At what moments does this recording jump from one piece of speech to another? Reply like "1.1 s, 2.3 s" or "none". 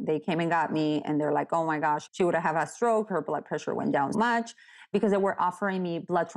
2.1 s, 4.1 s